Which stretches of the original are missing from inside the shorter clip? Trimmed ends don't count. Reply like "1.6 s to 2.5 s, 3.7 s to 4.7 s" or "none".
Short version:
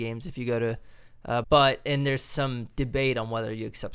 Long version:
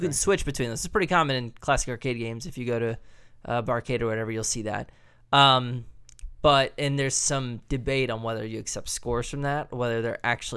3.6 s to 6.4 s